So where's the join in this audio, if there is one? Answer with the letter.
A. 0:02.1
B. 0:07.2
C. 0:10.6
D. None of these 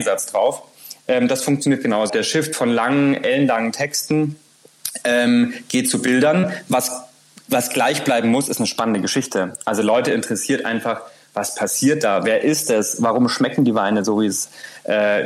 A